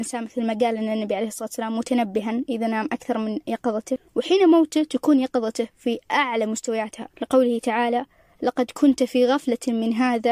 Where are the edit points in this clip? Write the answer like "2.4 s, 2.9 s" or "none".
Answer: 7.1 s